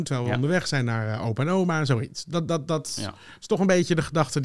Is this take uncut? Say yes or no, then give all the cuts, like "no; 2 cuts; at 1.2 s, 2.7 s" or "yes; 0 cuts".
yes; 0 cuts